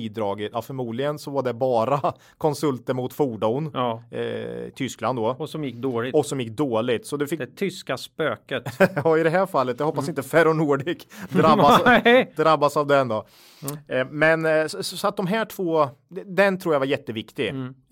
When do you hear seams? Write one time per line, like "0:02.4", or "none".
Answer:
none

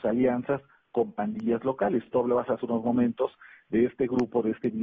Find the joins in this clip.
none

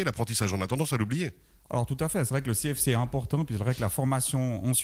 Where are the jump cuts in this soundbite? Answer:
none

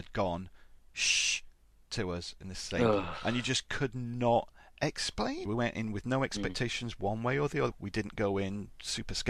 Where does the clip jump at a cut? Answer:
0:05.5
0:07.7

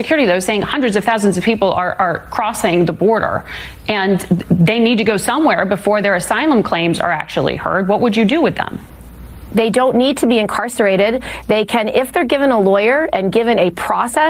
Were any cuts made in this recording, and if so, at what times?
none

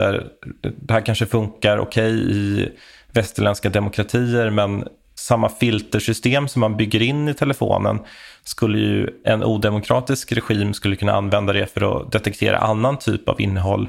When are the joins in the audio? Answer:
none

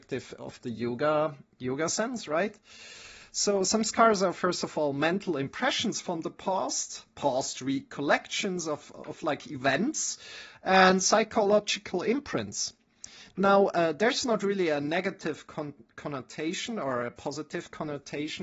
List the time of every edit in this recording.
none

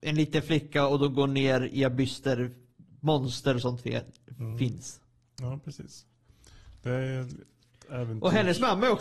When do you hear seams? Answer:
none

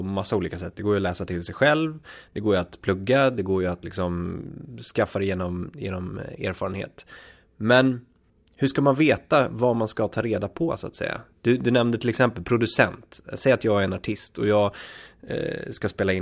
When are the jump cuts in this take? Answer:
none

